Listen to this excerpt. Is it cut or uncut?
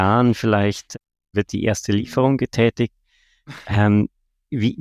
uncut